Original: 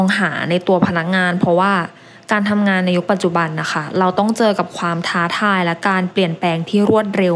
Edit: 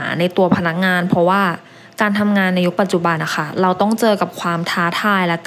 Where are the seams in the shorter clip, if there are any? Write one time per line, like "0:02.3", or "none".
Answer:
0:03.2